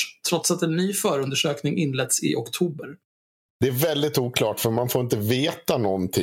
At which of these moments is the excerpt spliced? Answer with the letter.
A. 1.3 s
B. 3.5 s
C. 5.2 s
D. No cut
B